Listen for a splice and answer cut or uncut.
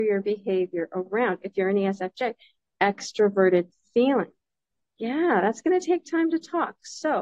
uncut